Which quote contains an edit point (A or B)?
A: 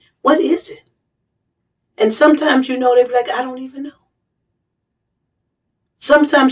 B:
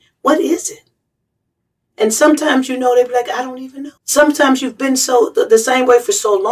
B